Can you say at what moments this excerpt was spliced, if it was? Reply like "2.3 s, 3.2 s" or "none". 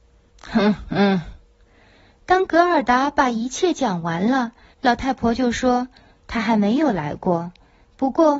4.7 s